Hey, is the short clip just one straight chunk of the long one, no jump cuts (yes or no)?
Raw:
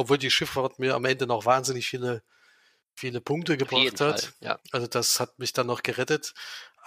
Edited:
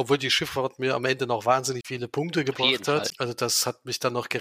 no